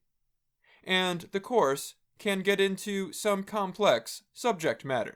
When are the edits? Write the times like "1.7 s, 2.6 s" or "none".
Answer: 3.4 s